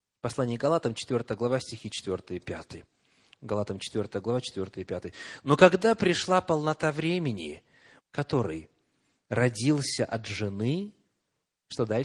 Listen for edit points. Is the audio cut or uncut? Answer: cut